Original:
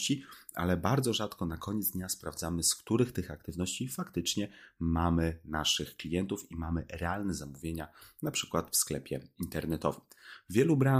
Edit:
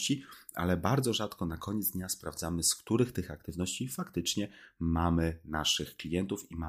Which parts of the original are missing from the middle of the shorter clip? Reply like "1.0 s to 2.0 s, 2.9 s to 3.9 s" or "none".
none